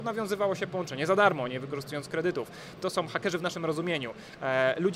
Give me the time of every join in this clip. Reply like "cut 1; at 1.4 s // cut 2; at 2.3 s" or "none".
cut 1; at 2.7 s